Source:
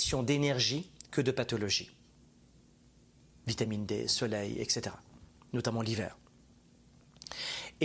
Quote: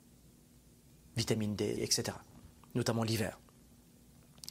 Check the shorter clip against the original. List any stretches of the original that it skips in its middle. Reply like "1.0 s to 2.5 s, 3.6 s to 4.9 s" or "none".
4.1 s to 4.5 s